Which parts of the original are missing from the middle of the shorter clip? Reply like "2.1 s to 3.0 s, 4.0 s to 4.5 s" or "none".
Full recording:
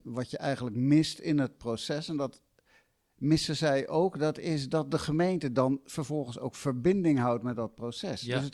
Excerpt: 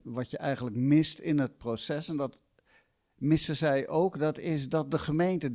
none